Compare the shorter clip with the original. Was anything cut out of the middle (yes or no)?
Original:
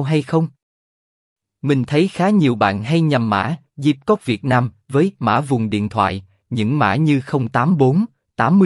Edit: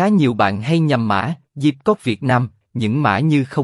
yes